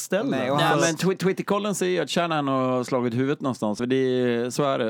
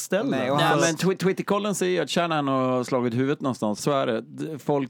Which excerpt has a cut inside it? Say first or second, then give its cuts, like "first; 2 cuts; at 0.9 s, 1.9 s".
second; 1 cut; at 3.8 s